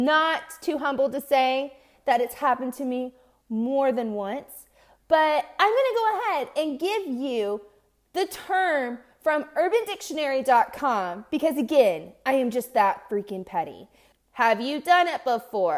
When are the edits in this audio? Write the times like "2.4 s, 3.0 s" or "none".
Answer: 14.1 s